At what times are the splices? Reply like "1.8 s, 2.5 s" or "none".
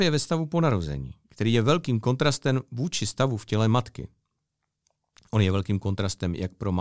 none